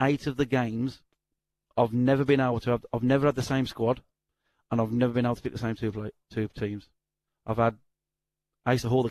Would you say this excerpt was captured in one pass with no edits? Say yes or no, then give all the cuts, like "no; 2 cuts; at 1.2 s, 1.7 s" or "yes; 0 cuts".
yes; 0 cuts